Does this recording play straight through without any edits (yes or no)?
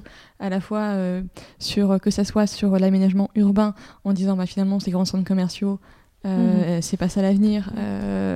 yes